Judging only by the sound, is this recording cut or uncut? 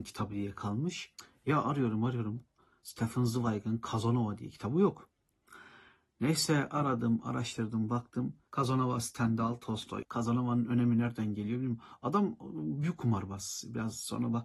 cut